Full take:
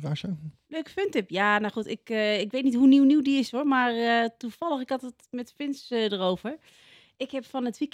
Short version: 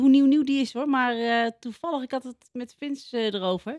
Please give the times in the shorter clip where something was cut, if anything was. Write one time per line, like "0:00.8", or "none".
none

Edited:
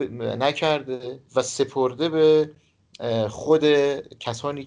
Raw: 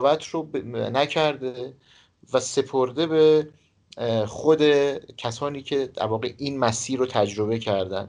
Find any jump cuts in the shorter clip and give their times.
0:01.3

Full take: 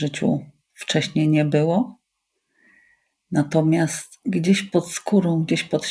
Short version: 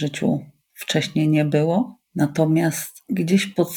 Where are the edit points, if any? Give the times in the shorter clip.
0:02.1

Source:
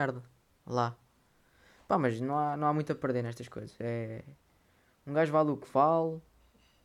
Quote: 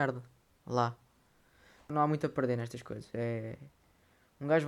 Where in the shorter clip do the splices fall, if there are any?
0:01.9

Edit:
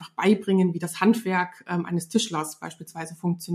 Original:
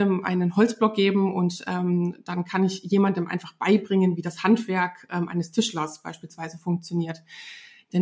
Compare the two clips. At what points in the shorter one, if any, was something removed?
none

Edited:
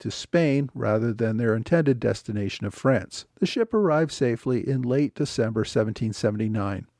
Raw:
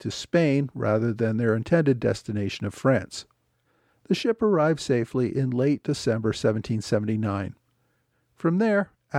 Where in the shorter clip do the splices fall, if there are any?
0:03.3

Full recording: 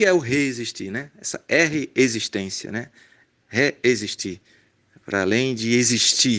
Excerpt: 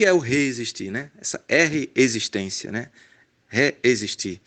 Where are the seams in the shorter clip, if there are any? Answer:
none

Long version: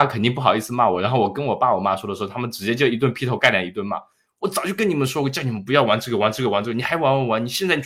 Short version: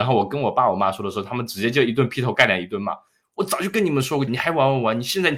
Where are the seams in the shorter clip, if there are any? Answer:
0:04.3

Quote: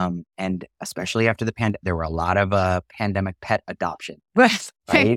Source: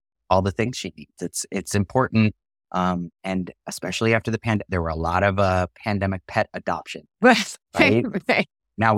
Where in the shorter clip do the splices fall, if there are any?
none

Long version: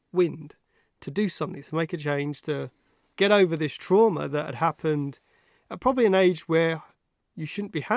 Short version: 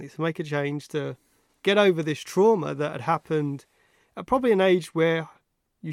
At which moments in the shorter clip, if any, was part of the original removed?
none

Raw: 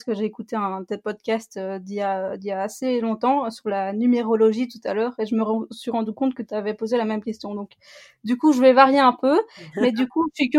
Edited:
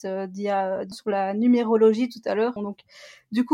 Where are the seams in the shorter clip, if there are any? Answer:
0:00.9
0:02.6

